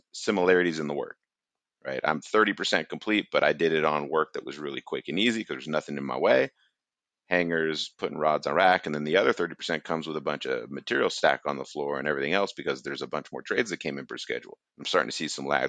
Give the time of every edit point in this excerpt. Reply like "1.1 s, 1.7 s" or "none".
14.7 s